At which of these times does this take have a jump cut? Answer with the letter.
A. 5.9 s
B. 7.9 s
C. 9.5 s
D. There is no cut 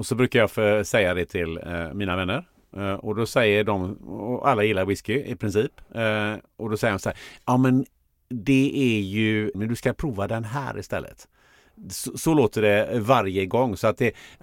C